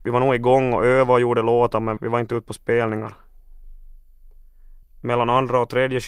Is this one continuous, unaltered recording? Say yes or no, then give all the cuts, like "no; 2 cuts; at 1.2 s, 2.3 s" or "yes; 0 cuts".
no; 2 cuts; at 2.0 s, 4.8 s